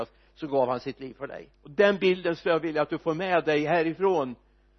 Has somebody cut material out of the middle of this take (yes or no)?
yes